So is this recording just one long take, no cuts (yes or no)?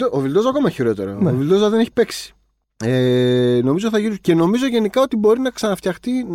yes